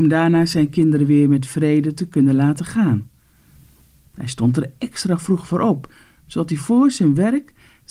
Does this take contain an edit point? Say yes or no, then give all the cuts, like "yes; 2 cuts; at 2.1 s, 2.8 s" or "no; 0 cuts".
no; 0 cuts